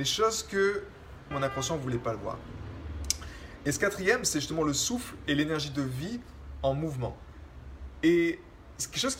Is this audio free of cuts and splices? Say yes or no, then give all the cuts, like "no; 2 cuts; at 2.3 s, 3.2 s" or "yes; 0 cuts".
no; 1 cut; at 1.3 s